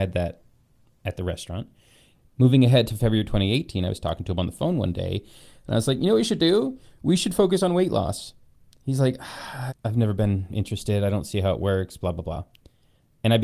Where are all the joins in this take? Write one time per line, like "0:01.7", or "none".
0:09.7